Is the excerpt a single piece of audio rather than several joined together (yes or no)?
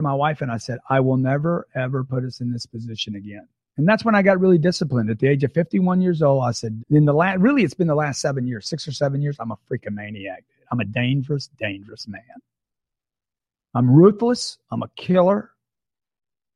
no